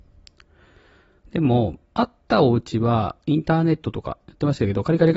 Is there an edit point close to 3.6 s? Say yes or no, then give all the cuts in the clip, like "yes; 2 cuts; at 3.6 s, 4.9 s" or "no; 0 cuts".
no; 1 cut; at 1.8 s